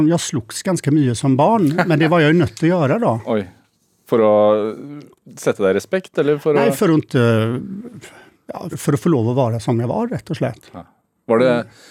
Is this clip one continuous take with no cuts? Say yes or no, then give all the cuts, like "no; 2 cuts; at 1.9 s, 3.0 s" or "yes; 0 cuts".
no; 1 cut; at 8.7 s